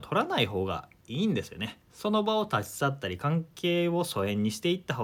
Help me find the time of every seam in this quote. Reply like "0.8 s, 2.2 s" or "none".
none

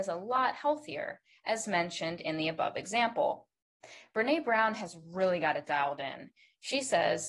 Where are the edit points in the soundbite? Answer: none

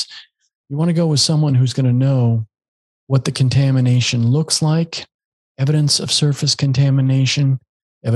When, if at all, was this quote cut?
none

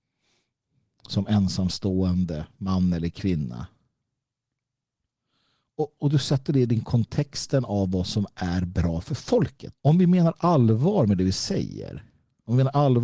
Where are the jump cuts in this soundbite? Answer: 6.0 s, 9.7 s

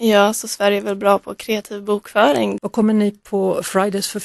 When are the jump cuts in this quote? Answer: 2.6 s

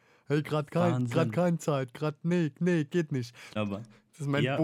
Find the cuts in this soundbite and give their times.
3.6 s

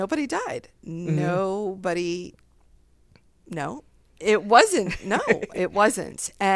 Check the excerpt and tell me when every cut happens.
4.2 s

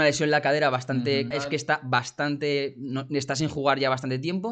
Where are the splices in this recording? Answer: 1.3 s

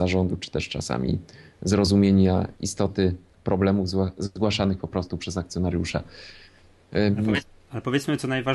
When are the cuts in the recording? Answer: none

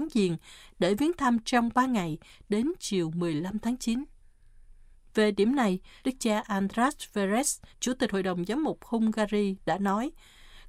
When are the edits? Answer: 6.0 s, 7.7 s

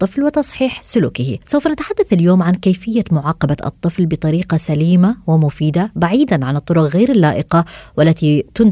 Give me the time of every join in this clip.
1.4 s

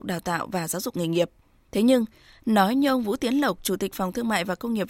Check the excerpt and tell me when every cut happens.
1.7 s

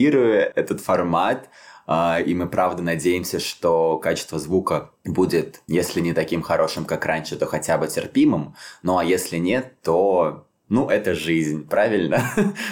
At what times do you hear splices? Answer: none

